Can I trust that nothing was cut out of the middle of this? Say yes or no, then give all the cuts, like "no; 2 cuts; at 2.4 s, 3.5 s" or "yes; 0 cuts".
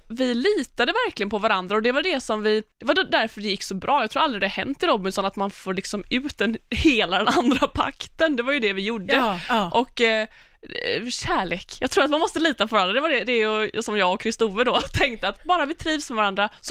no; 1 cut; at 2.7 s